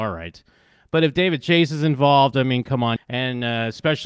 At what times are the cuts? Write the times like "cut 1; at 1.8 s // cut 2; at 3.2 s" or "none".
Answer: cut 1; at 3.0 s